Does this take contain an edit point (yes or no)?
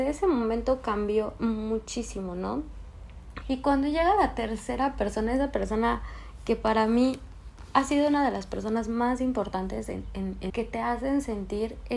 yes